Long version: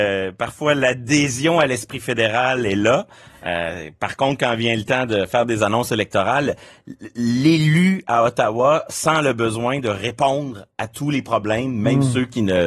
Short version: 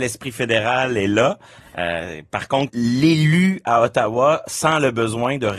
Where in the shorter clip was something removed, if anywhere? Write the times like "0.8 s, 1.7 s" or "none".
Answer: 2.7 s